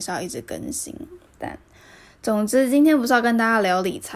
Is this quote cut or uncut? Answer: uncut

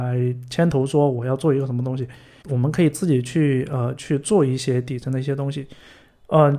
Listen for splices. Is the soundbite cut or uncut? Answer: cut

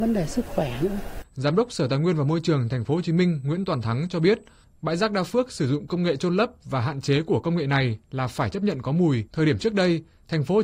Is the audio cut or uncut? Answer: cut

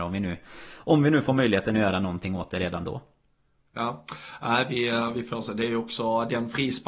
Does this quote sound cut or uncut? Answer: uncut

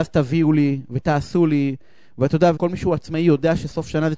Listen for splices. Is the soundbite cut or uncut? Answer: cut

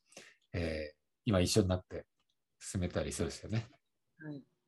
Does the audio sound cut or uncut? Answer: uncut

